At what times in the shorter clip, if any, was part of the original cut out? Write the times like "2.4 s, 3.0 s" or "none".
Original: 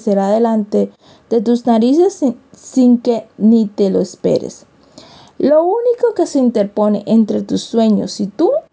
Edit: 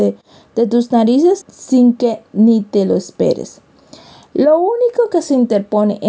1.4 s